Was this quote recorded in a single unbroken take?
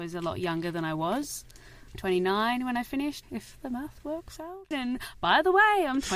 no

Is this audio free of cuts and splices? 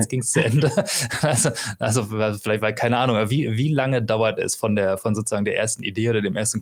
yes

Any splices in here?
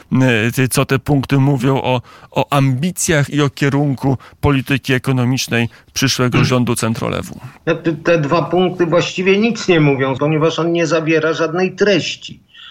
yes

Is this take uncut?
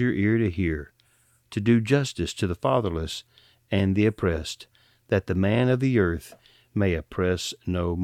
yes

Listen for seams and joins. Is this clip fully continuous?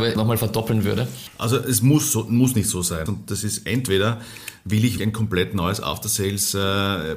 no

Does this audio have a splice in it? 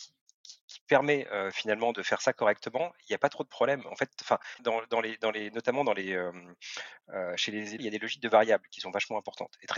yes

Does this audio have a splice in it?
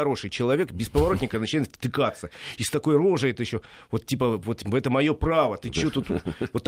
no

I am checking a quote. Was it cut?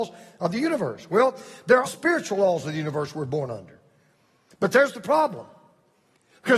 yes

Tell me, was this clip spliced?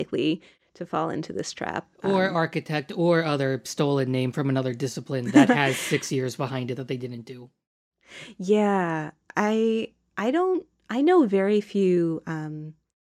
no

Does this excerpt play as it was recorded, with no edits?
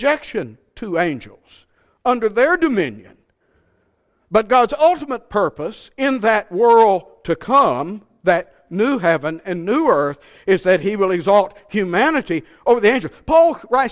yes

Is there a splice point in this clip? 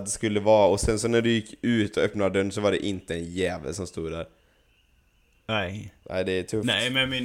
yes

